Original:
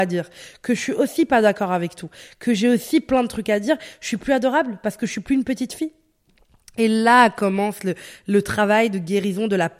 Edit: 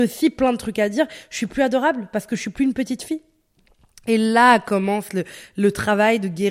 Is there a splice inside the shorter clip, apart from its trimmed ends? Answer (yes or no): no